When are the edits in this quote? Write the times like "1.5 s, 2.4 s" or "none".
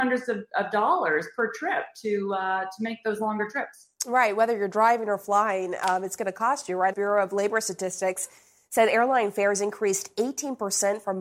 6.9 s